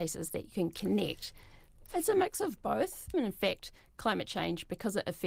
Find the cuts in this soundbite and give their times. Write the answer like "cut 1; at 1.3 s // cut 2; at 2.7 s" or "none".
cut 1; at 1.9 s // cut 2; at 3.1 s

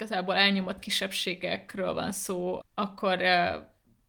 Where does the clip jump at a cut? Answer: cut 1; at 2.6 s

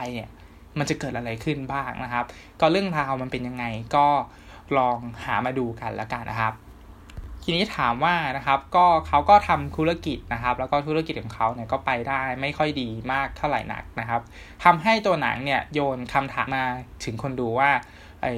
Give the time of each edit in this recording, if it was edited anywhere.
cut 1; at 6.2 s // cut 2; at 16.5 s

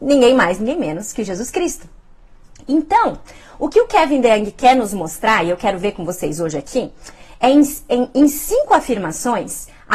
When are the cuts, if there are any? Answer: none

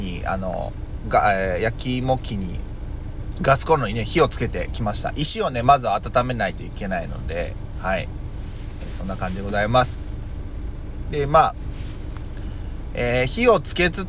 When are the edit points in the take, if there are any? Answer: none

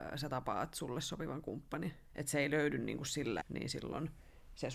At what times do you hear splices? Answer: cut 1; at 2.0 s // cut 2; at 3.4 s

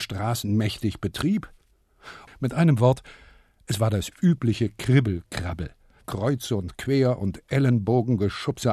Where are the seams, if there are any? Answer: cut 1; at 2.3 s

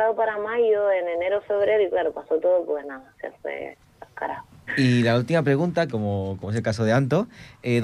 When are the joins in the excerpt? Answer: cut 1; at 4.7 s // cut 2; at 5.9 s

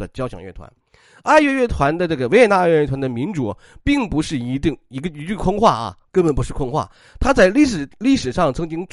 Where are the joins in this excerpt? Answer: none

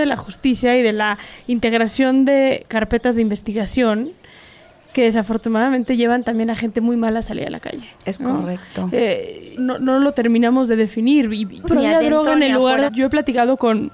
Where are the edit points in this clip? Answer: cut 1; at 9.6 s // cut 2; at 11.6 s // cut 3; at 12.9 s

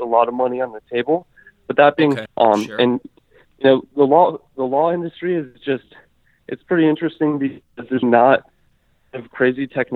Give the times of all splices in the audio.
cut 1; at 2.3 s // cut 2; at 8.0 s

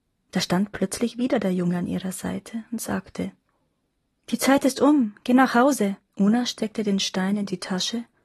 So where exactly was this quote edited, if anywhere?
cut 1; at 6.1 s

